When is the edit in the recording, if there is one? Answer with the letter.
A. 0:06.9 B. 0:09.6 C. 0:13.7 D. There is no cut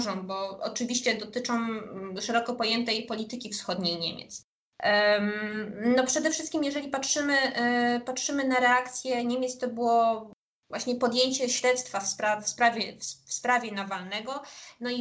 D